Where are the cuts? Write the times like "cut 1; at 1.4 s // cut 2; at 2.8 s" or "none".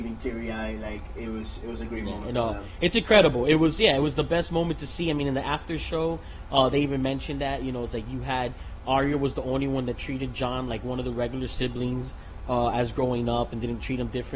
none